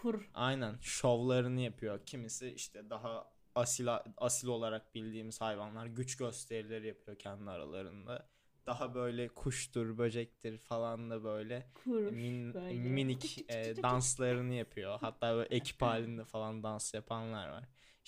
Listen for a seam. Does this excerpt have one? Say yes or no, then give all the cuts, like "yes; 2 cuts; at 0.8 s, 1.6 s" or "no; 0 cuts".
no; 0 cuts